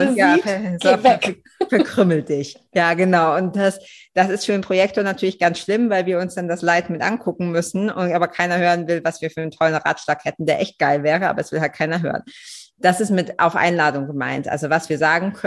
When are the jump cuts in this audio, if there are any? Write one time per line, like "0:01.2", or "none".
none